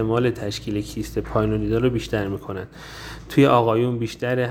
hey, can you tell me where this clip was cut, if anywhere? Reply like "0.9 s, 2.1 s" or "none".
none